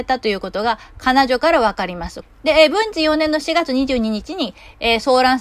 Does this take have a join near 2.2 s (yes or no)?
yes